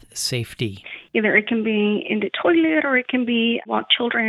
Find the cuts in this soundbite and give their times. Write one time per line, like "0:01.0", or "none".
0:01.1